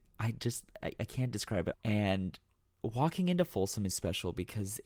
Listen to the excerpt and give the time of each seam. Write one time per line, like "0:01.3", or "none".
0:01.7
0:03.9